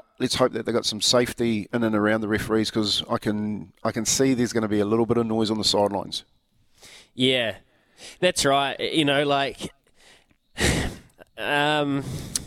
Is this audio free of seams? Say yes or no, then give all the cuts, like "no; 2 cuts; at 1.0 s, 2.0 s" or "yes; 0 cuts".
yes; 0 cuts